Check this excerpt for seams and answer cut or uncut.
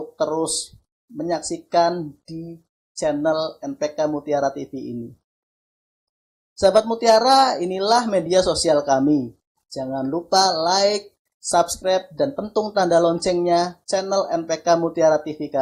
uncut